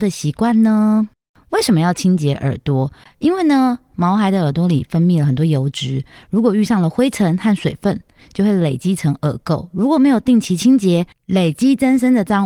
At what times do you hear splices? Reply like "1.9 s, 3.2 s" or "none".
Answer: none

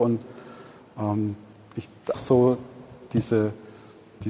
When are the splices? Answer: 2.1 s

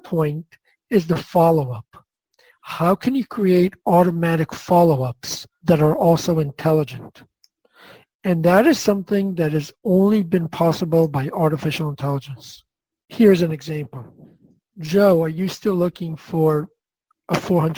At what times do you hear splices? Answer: none

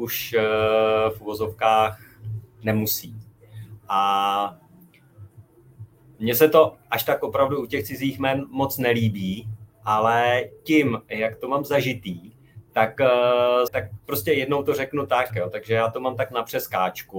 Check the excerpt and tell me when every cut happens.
13.7 s, 15.3 s

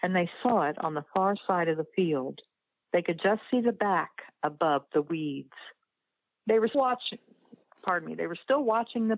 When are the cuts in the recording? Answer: 6.7 s

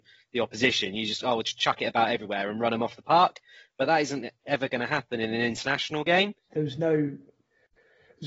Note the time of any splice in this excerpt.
6.5 s

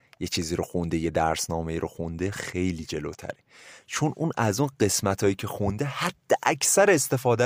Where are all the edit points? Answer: none

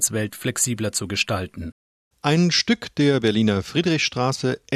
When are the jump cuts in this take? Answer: 2.1 s

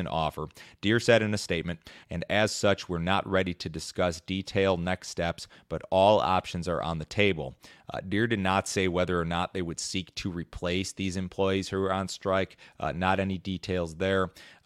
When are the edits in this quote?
2.0 s

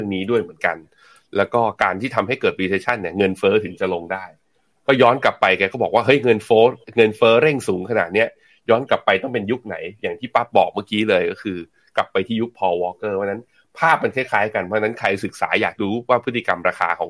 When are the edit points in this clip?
none

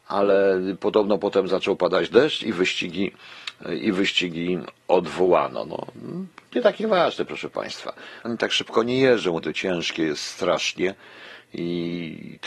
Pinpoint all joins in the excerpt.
8.3 s, 9.4 s

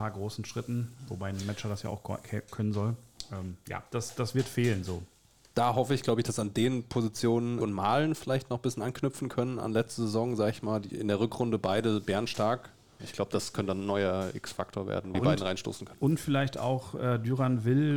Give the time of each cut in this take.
7.6 s, 13.0 s, 15.1 s

